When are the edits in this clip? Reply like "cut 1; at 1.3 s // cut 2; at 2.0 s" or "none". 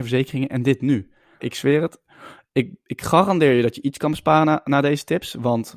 cut 1; at 1.4 s

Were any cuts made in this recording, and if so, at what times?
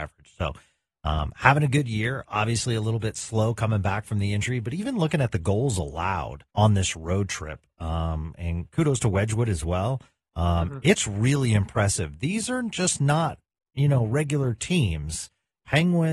cut 1; at 6.5 s

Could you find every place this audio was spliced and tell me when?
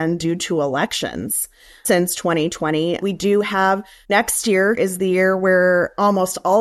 cut 1; at 4.8 s

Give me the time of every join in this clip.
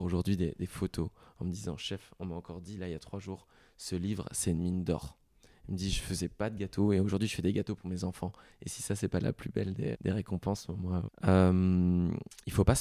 cut 1; at 9.9 s // cut 2; at 11.1 s

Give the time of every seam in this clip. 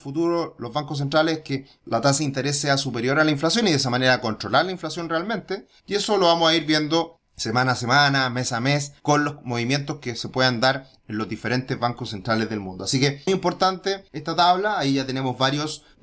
cut 1; at 13.3 s

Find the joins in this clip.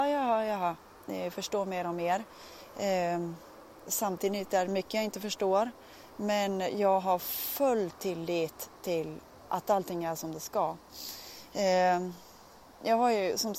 none

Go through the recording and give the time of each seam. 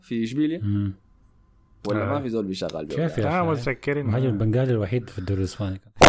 none

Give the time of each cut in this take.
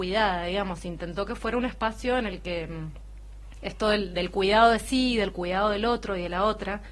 none

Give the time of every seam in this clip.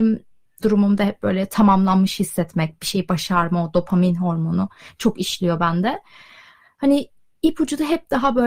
none

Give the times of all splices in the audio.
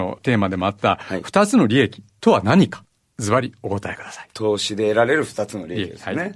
none

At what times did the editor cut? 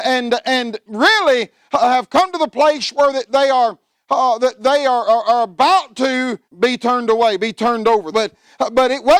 cut 1; at 6.5 s // cut 2; at 8.1 s

